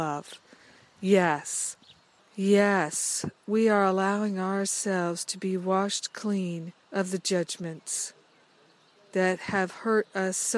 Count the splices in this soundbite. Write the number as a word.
two